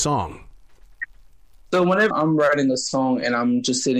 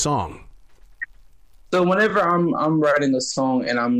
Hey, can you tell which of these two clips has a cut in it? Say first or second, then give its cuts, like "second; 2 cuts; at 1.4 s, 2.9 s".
first; 1 cut; at 2.1 s